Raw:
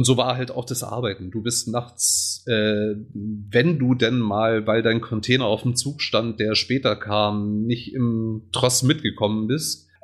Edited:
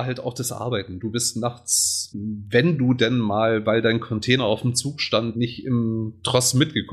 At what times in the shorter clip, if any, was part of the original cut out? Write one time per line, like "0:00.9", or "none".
0:02.1
0:05.3